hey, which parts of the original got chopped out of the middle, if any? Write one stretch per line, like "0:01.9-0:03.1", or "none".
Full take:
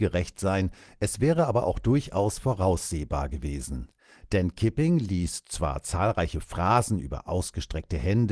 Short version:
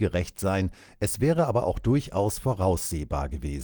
none

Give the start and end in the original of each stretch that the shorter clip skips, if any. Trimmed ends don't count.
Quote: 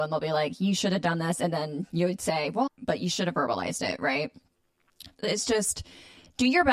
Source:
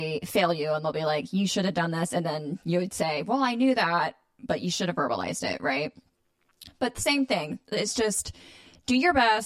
0:03.4-0:04.3
0:06.7-0:07.6

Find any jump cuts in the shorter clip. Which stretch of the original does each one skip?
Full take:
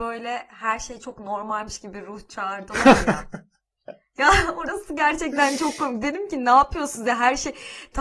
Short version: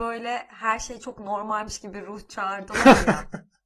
none

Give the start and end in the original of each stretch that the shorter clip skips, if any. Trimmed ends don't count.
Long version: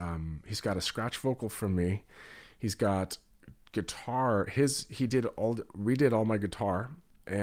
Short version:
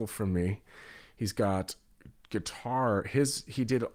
none

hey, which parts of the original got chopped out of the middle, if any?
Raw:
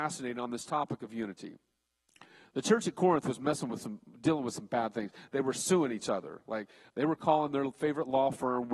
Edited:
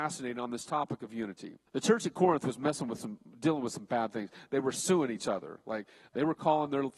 0:01.7-0:02.5

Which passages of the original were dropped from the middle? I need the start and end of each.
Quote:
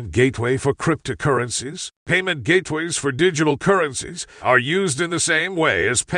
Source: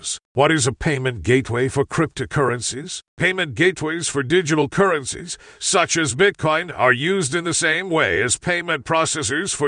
0:05.5-0:06.7

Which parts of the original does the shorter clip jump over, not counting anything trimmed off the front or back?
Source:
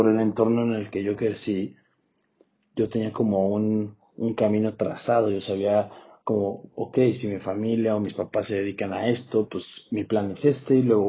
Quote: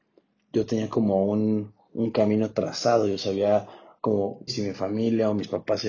0:06.7-0:07.1

